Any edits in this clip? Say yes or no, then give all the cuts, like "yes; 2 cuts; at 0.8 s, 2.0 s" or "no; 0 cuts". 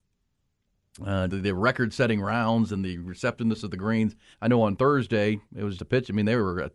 yes; 3 cuts; at 1.3 s, 4.3 s, 5.8 s